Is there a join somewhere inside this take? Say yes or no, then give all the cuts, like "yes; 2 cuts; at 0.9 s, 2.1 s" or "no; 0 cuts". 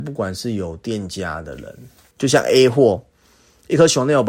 yes; 1 cut; at 2.1 s